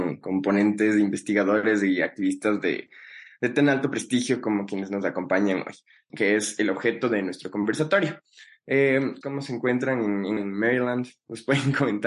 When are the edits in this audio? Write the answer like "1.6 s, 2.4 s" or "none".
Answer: 6.1 s, 9.2 s, 10.4 s